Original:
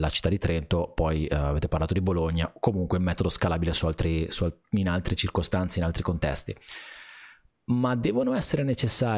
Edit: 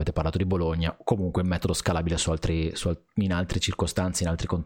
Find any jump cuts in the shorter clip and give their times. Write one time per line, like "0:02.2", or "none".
none